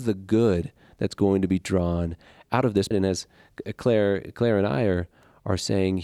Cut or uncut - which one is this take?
cut